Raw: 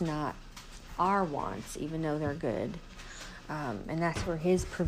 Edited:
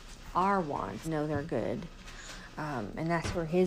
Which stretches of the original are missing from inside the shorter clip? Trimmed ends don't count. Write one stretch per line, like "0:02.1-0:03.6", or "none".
0:01.7-0:02.0